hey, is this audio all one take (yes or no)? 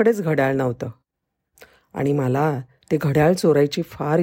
yes